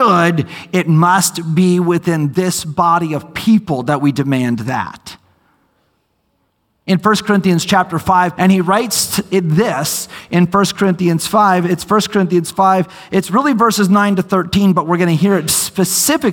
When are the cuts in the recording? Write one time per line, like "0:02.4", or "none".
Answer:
0:08.4